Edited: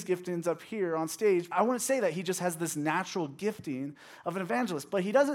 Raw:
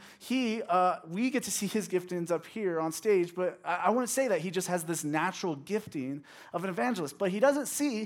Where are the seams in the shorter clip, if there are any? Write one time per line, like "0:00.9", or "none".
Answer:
0:01.5